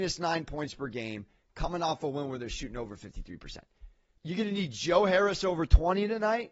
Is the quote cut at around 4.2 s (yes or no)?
yes